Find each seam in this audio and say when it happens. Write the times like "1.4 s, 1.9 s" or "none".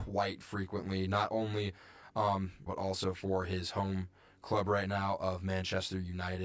2.7 s